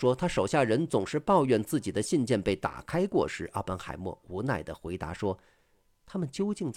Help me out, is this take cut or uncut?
uncut